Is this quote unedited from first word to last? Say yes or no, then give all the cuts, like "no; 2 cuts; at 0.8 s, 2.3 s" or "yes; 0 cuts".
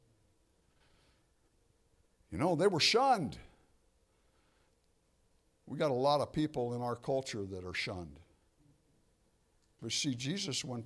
no; 1 cut; at 9.8 s